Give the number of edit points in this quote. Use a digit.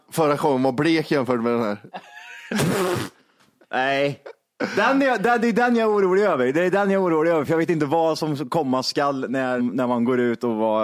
1